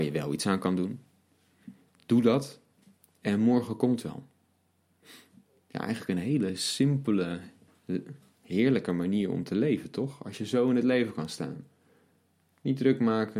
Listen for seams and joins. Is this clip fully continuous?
yes; 0 cuts

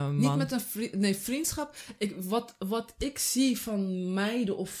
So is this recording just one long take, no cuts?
yes; 0 cuts

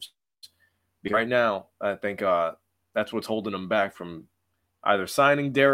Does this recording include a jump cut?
no; 0 cuts

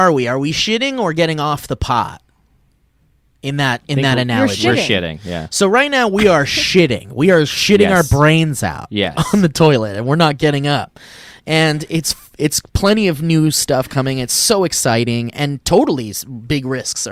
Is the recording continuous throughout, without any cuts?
yes; 0 cuts

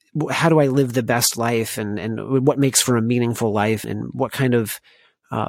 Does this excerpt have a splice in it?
yes; 1 cut; at 3.8 s

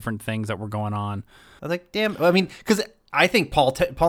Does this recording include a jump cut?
yes; 1 cut; at 1.6 s

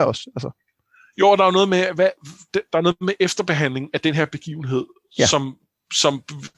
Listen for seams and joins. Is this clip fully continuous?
yes; 0 cuts

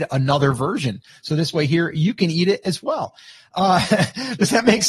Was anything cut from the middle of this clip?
no; 0 cuts

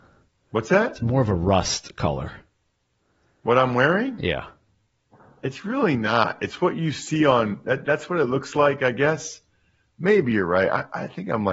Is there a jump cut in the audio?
no; 0 cuts

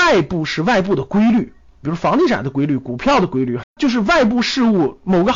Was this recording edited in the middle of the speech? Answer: yes; 2 cuts; at 1.8 s, 3.6 s

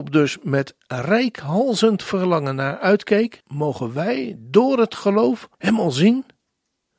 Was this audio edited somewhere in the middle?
yes; 2 cuts; at 3.4 s, 5.5 s

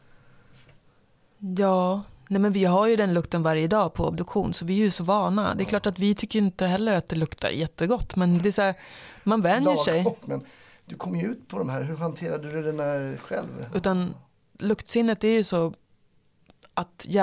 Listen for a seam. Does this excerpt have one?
yes; 3 cuts; at 8.4 s, 10.2 s, 13.7 s

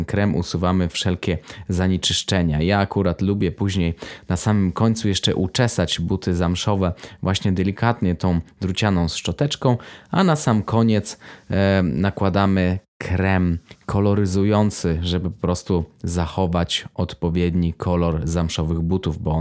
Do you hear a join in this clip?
no; 0 cuts

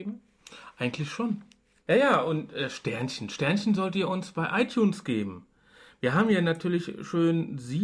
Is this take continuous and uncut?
yes; 0 cuts

